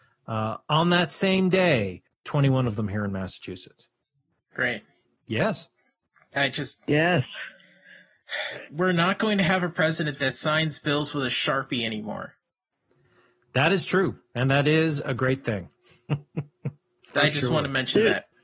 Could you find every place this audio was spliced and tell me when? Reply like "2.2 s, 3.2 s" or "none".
2.1 s, 5.0 s